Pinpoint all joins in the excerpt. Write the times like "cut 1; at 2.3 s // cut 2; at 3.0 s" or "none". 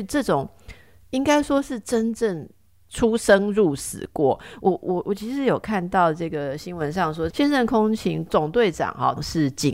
cut 1; at 7.3 s